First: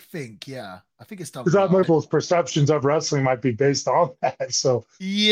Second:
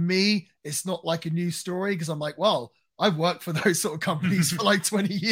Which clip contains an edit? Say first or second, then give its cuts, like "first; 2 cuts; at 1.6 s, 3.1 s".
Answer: first; 1 cut; at 1.8 s